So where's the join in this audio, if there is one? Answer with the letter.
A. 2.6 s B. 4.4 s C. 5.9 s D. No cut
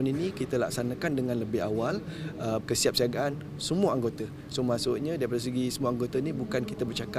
A